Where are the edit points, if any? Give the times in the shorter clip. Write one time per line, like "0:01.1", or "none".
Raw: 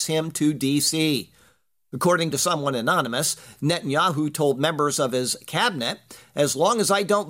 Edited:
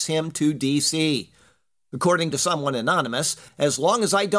0:03.5